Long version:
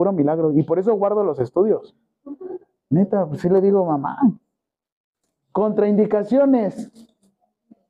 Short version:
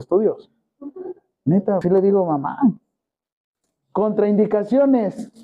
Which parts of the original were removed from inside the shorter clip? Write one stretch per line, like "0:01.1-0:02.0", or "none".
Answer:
0:03.3-0:03.4